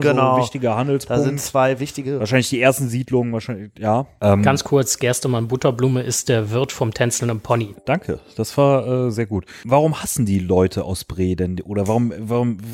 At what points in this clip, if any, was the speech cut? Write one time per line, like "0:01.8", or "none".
0:04.2

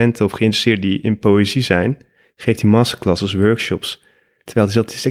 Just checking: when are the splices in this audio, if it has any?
none

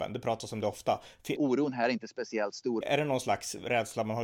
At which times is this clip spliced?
0:01.4
0:02.8

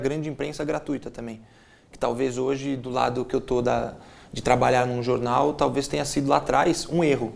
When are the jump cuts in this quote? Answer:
none

